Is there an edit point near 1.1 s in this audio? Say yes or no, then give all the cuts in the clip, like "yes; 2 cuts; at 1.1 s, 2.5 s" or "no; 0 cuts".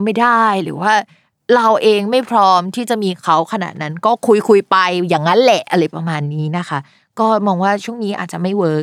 no; 0 cuts